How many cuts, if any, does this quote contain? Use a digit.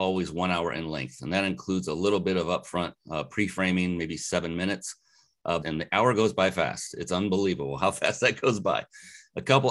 1